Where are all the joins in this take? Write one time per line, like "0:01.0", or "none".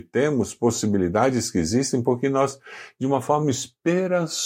none